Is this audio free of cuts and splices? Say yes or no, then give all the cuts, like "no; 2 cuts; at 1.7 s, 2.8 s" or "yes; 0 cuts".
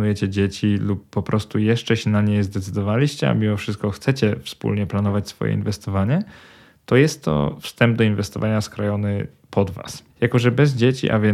no; 1 cut; at 10.1 s